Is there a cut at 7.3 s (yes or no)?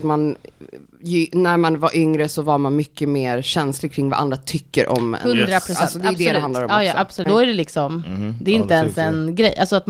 yes